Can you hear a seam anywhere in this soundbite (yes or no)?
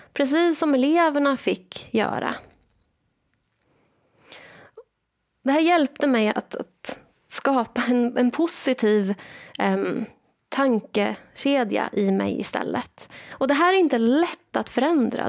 no